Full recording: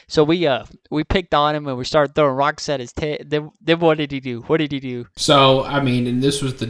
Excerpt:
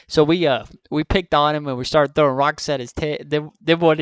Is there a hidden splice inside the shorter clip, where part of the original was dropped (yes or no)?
no